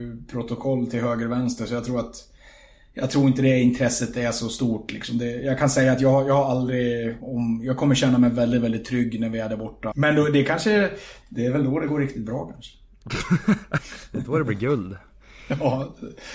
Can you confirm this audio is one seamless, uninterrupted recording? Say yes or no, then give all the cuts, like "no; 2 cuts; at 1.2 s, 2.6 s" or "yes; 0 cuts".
no; 3 cuts; at 7.2 s, 9.9 s, 11.2 s